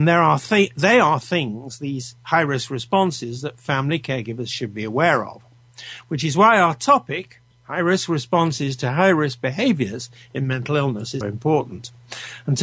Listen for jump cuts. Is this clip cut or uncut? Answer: cut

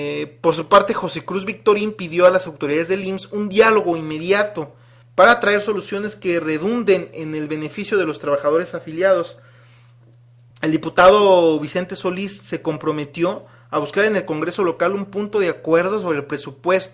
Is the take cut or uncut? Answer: cut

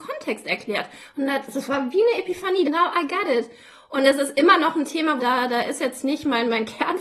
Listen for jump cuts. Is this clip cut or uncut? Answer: cut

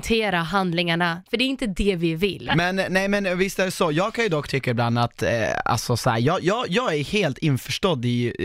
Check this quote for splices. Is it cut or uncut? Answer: cut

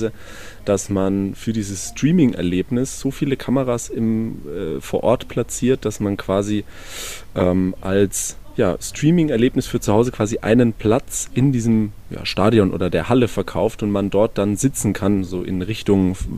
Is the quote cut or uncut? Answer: uncut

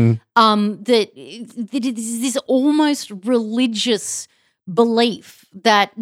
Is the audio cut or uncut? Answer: uncut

